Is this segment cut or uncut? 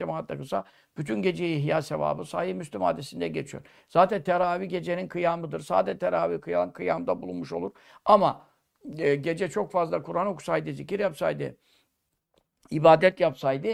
uncut